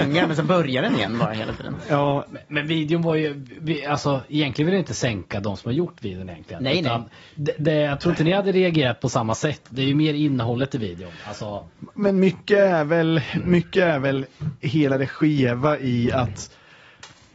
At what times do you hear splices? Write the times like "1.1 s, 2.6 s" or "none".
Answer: none